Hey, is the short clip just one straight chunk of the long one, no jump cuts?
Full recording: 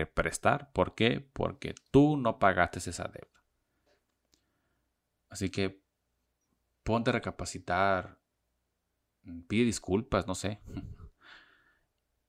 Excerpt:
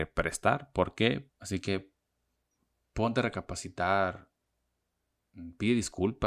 no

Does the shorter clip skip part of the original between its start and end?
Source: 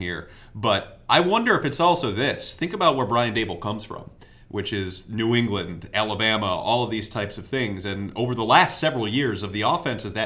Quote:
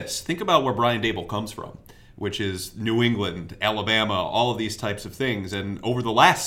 no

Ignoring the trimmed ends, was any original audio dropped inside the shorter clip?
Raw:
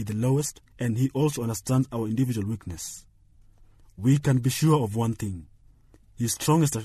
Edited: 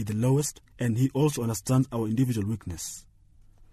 no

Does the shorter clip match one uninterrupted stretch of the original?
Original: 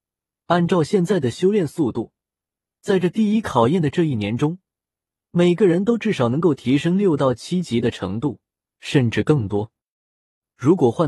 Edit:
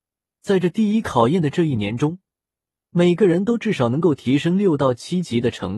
yes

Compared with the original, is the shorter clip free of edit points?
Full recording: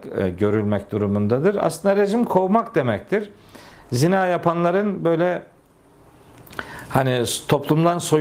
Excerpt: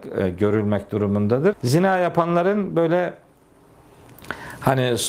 no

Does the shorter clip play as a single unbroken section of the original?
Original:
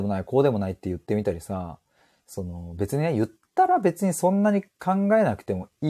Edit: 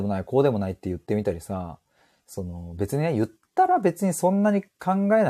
yes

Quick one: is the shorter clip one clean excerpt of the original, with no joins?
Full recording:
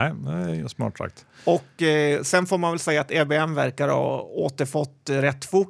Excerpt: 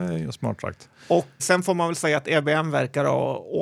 no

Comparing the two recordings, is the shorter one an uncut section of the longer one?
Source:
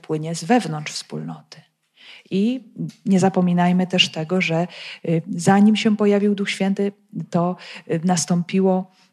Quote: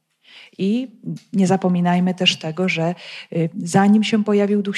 yes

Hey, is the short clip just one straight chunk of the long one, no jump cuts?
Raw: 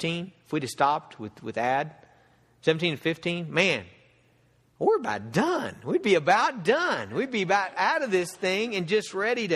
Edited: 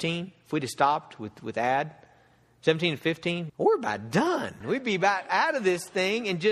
no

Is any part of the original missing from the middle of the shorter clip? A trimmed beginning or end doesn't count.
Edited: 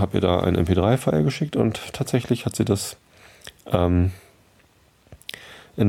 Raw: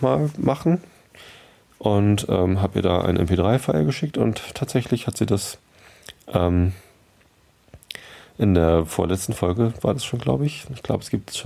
no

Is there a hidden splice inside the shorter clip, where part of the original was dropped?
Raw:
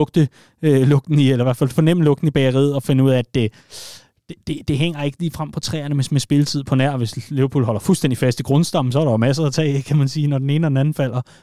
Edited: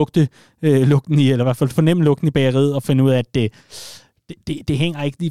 no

